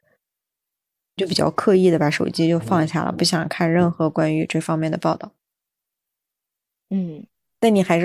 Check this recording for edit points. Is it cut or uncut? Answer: cut